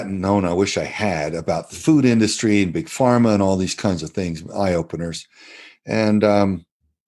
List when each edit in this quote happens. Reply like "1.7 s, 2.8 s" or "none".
none